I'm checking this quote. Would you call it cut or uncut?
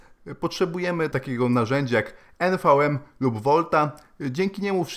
cut